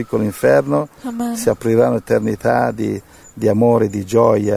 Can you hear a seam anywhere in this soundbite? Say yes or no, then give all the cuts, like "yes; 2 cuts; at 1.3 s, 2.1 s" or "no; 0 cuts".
no; 0 cuts